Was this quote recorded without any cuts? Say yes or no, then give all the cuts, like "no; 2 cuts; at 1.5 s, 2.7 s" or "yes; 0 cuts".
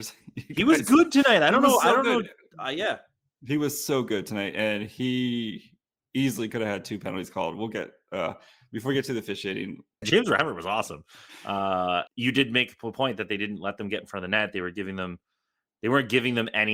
no; 2 cuts; at 10.0 s, 12.1 s